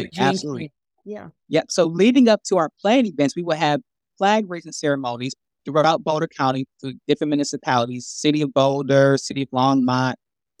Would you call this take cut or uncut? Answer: cut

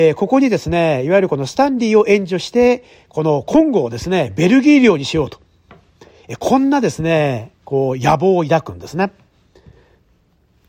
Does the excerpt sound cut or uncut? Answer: uncut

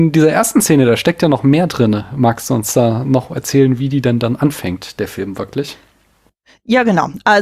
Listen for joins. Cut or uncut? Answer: uncut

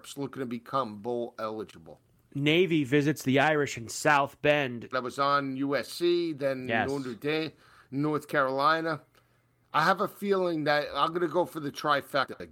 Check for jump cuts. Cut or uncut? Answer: cut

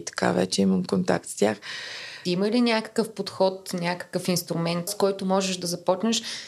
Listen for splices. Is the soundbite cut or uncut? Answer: cut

